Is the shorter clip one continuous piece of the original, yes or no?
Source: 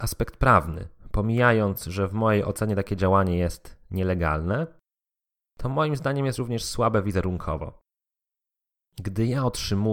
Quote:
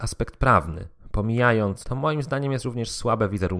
no